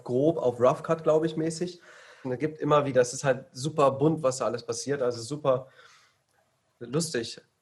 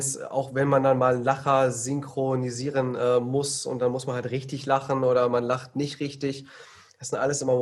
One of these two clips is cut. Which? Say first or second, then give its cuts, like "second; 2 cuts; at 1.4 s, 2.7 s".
first; 1 cut; at 2.2 s